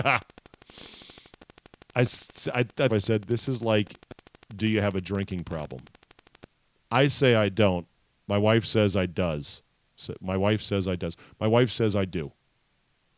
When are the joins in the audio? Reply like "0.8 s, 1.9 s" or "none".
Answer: 2.9 s